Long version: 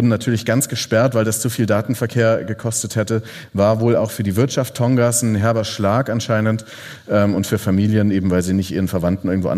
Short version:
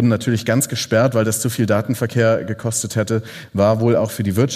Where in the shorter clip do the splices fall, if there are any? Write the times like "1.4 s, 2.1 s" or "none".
none